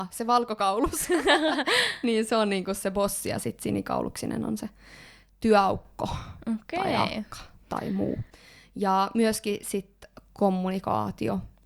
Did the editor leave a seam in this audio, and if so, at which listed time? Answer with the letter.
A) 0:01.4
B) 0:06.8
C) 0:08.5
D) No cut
D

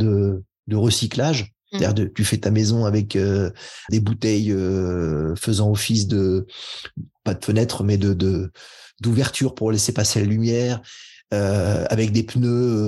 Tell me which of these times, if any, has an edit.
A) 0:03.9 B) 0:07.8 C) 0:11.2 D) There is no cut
A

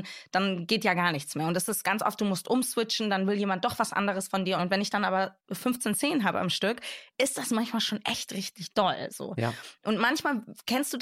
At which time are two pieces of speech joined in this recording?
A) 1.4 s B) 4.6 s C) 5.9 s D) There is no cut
B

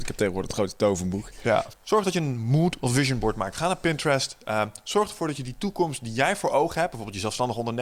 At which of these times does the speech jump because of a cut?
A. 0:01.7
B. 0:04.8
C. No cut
A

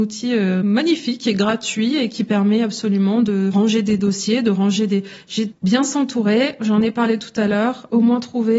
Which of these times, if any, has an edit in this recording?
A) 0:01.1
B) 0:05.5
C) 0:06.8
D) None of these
B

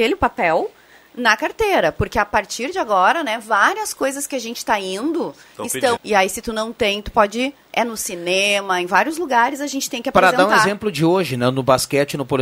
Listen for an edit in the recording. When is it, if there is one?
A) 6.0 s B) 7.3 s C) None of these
A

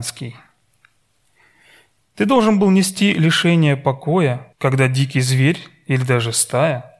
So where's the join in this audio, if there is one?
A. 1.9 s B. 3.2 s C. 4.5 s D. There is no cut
C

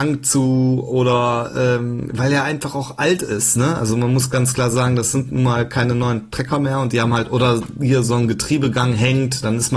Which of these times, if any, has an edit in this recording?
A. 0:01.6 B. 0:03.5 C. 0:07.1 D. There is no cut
D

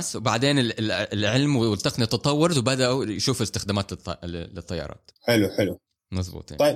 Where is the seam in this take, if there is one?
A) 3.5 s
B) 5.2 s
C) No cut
B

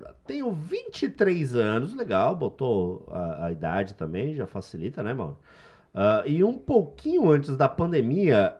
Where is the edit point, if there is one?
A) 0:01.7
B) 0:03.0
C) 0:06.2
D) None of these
D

